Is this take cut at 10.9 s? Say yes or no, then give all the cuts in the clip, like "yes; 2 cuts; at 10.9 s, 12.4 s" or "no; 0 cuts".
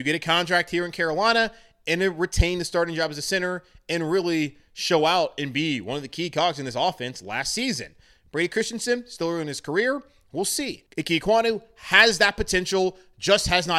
yes; 1 cut; at 10.9 s